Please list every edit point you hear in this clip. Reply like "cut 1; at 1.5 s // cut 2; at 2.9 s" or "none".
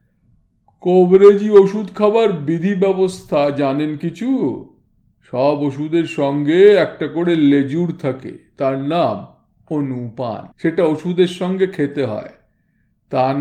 cut 1; at 10.5 s